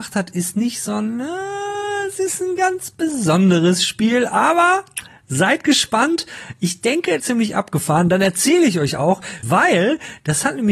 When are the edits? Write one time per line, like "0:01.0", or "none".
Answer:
0:07.2
0:09.4